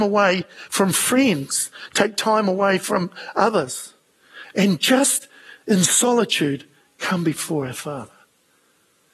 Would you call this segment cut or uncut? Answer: uncut